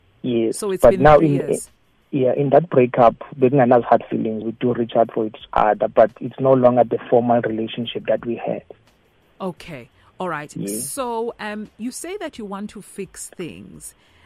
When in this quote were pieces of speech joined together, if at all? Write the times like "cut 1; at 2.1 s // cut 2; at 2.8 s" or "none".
cut 1; at 4.4 s